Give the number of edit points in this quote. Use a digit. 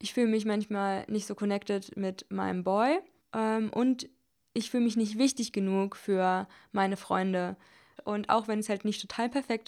2